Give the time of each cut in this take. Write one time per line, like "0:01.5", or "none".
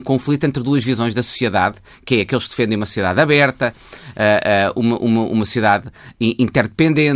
none